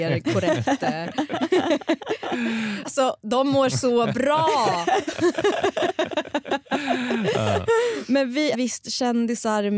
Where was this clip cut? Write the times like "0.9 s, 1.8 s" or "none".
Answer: 2.8 s, 8.5 s